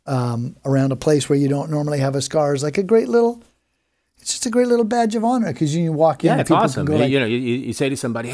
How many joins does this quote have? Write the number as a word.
zero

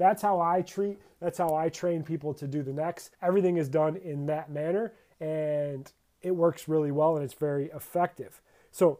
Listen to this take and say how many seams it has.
one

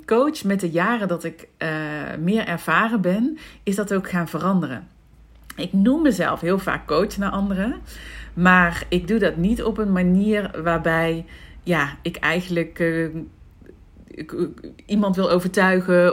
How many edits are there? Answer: zero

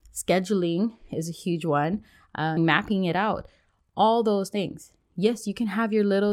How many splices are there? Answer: one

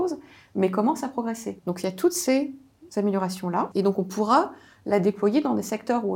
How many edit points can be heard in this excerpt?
two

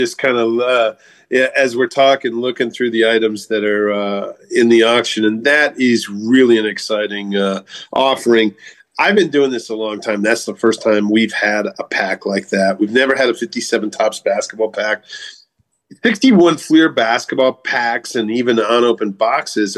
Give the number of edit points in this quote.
zero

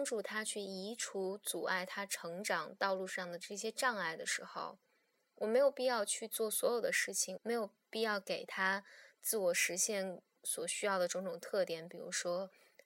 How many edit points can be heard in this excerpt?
one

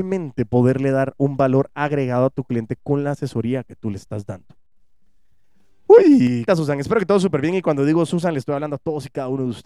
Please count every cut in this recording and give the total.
one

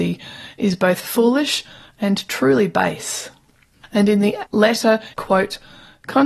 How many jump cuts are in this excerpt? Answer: two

